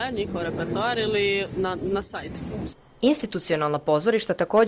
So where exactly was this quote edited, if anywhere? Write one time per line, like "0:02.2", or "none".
none